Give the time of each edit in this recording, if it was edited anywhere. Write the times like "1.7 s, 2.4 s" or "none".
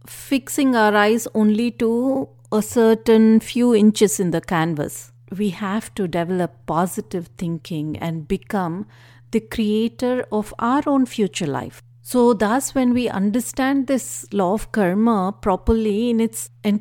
5.3 s, 11.9 s